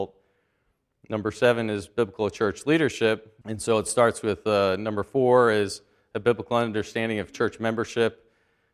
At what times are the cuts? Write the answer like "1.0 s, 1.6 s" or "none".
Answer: 3.4 s